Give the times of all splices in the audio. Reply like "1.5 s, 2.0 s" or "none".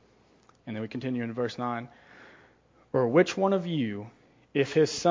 none

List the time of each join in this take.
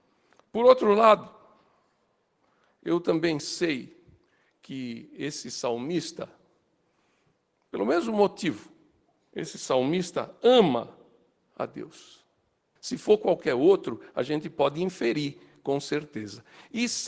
12.8 s

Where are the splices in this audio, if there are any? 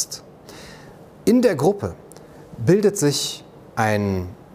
none

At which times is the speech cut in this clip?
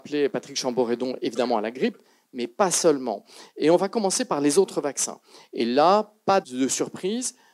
6.4 s

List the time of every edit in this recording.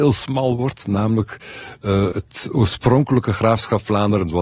2.1 s

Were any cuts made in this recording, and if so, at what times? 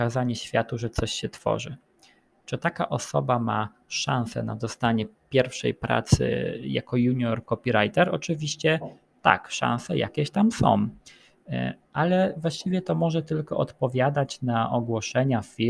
none

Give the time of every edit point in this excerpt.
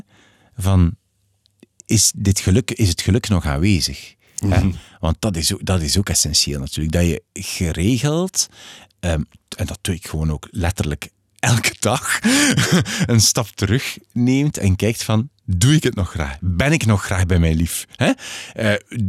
none

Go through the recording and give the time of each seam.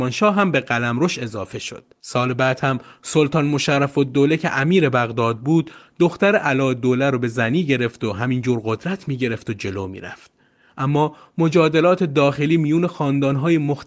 1.9 s

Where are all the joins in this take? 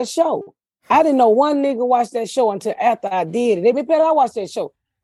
3.7 s

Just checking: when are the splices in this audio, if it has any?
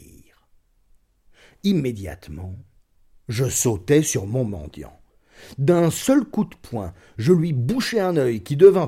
none

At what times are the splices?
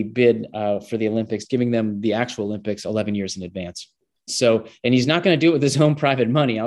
4.3 s

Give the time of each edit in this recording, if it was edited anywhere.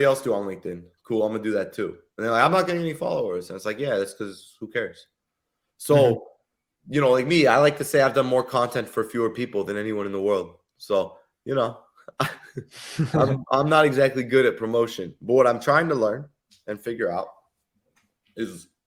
none

